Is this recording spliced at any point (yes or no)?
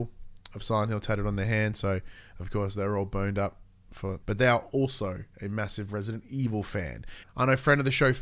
yes